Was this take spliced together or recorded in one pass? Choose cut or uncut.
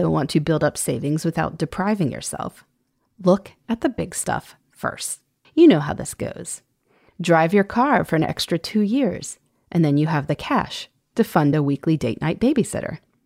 cut